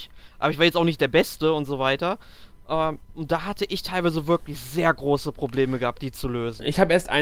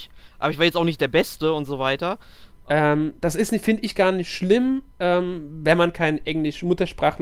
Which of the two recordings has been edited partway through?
second; 1 cut; at 2.7 s

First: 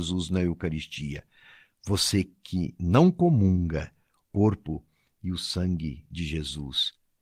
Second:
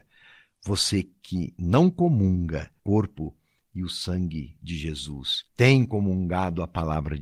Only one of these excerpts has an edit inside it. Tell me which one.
second; 2 cuts; at 2.8 s, 5.5 s

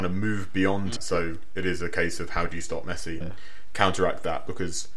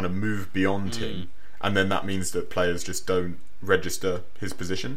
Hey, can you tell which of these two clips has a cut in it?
first; 2 cuts; at 1.0 s, 3.2 s

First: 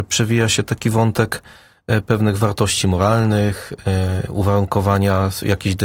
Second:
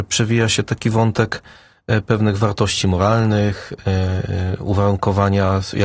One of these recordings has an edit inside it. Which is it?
first; 1 cut; at 4.3 s

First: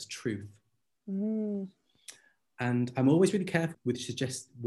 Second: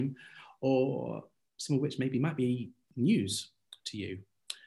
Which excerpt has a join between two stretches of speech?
first; 1 cut; at 3.7 s

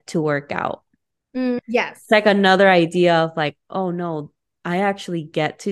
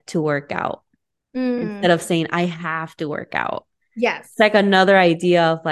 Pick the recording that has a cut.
first; 1 cut; at 1.6 s

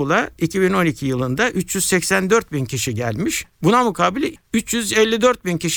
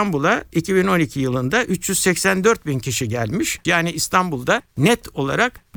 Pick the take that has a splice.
second; 1 cut; at 3.6 s

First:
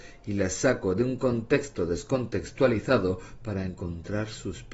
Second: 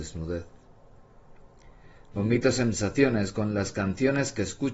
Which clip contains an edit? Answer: second; 1 cut; at 2.1 s

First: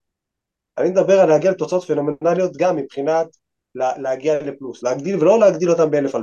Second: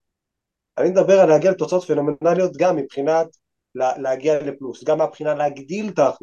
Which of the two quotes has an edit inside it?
first; 1 cut; at 4.8 s

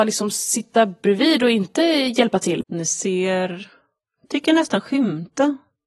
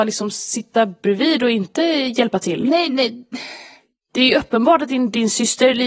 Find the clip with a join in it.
first; 1 cut; at 2.6 s

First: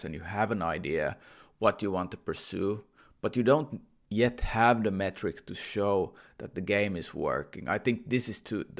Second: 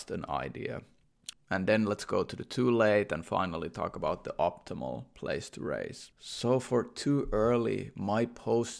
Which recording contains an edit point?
second; 1 cut; at 1.3 s

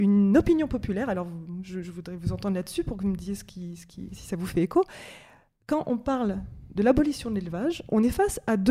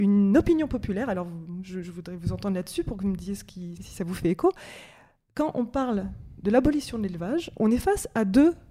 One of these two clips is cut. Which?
second; 1 cut; at 3.8 s

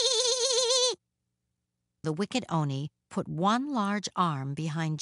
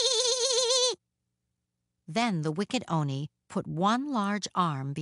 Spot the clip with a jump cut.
first; 1 cut; at 2.0 s

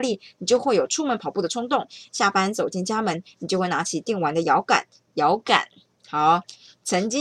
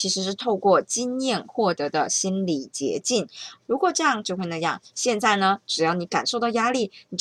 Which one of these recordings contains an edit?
second; 2 cuts; at 3.6 s, 4.9 s

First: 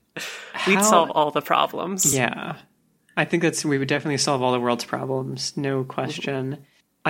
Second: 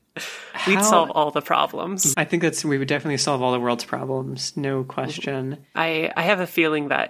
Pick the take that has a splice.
second; 2 cuts; at 2.1 s, 5.7 s

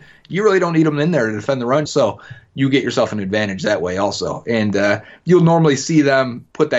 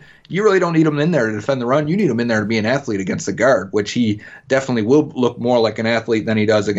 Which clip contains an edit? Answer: first; 1 cut; at 1.9 s

